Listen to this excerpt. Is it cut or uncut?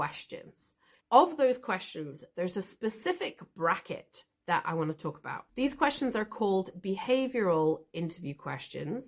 cut